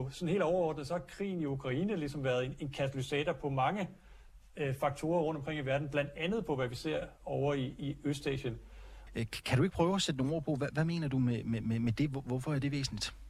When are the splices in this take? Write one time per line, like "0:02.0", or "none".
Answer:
0:09.1